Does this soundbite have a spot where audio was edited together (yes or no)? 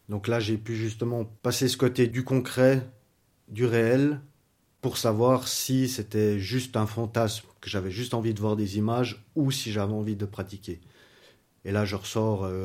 no